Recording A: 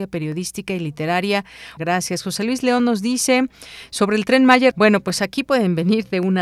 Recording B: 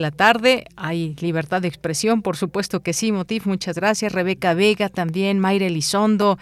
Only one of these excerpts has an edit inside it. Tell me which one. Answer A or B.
A